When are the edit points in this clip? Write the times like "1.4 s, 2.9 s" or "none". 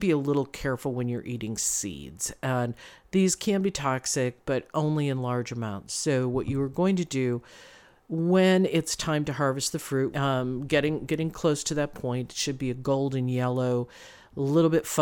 10.1 s